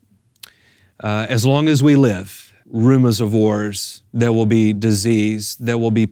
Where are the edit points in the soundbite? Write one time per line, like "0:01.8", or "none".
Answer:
0:02.6